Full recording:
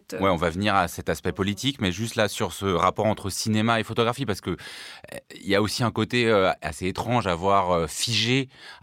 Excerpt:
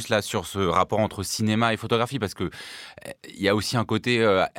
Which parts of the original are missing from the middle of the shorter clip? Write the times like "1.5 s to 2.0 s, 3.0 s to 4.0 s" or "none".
none

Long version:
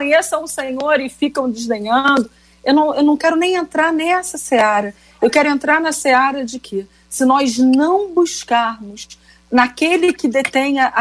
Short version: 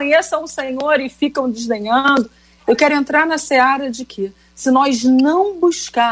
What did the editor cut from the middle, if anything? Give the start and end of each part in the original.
2.6 s to 5.1 s

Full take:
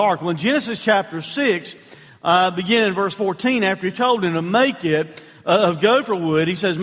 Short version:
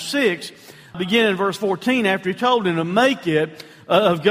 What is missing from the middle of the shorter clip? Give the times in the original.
2.2 s to 2.5 s

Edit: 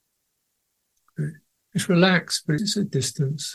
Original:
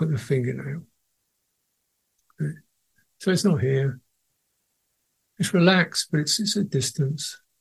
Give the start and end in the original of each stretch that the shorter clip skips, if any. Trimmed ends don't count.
2.7 s to 5.2 s, 6.2 s to 6.4 s

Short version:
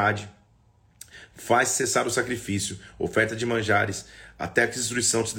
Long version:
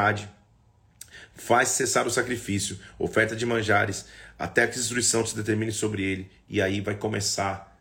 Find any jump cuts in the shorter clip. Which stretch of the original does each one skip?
none

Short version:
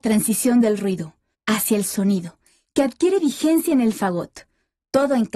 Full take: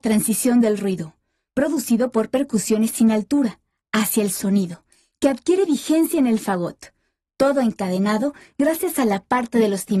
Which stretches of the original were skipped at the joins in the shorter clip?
1.3 s to 3.8 s

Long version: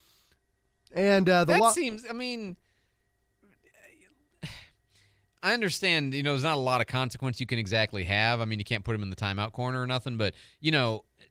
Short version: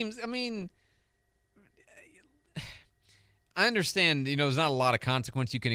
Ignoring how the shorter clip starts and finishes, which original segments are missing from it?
none

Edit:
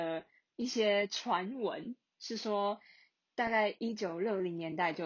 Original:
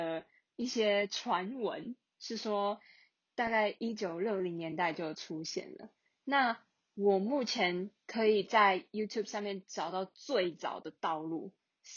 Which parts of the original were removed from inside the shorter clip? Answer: none

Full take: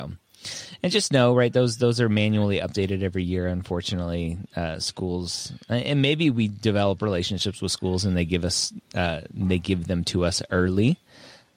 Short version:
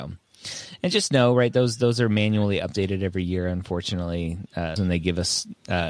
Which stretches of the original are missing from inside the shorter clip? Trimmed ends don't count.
4.8 s to 8.0 s

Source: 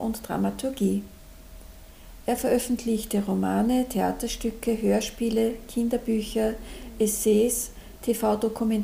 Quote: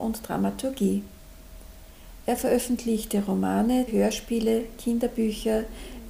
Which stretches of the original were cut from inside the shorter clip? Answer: 3.9 s to 4.8 s

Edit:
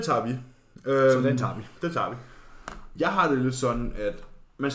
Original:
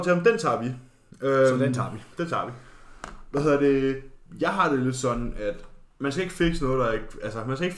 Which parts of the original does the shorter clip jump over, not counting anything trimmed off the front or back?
3.3 s to 4.4 s

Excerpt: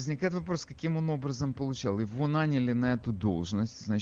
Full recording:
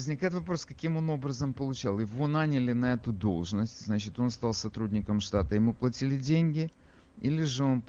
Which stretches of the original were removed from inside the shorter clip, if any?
none

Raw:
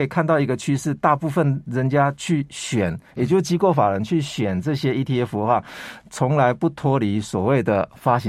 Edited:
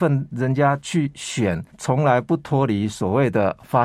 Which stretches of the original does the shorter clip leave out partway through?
3.0 s to 6.0 s

